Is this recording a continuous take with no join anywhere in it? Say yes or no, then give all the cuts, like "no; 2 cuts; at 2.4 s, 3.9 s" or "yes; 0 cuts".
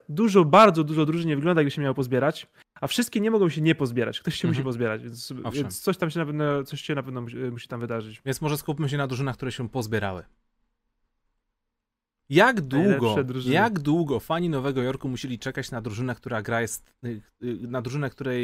yes; 0 cuts